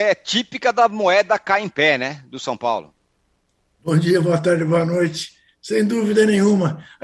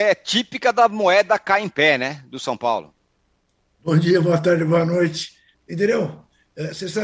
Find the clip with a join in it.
second; 1 cut; at 5.5 s

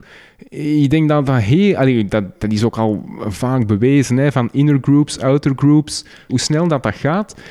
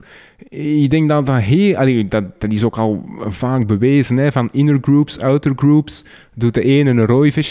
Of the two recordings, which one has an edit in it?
first; 1 cut; at 6.3 s

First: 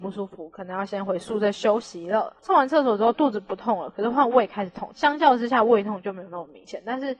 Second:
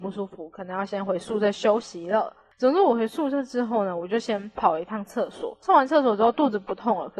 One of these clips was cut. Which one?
first; 2 cuts; at 2.4 s, 4.9 s

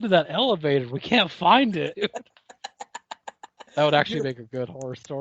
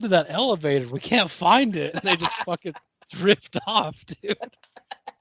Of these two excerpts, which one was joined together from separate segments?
first; 2 cuts; at 1.9 s, 3.7 s

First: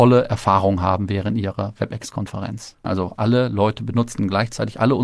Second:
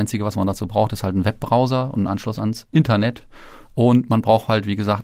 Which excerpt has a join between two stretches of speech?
first; 1 cut; at 2.8 s

